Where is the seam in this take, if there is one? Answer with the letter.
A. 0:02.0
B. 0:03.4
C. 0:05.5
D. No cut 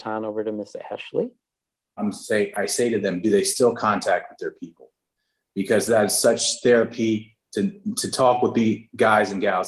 A